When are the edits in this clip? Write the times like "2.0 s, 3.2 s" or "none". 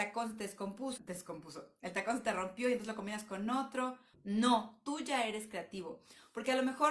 1.0 s, 4.1 s